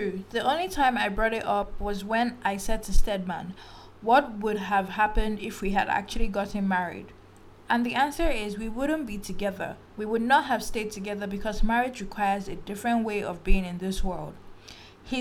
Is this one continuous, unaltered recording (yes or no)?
no